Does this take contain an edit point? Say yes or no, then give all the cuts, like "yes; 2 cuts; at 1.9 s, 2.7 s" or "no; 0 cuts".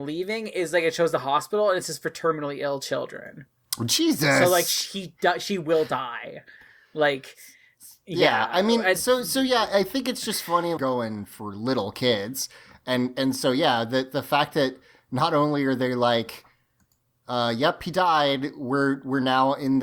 yes; 1 cut; at 10.8 s